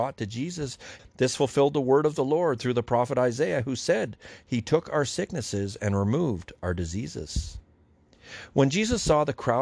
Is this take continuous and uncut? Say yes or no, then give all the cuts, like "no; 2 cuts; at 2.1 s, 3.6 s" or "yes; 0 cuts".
no; 1 cut; at 1.0 s